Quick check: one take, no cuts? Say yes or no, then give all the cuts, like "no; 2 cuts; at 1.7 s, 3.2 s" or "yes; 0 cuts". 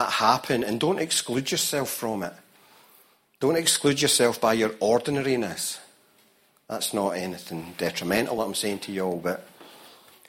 yes; 0 cuts